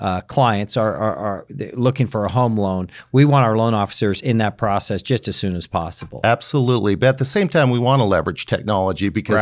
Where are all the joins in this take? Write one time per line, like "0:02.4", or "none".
none